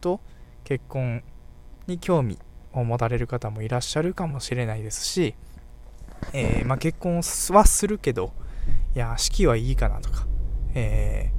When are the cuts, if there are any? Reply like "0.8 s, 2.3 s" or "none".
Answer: none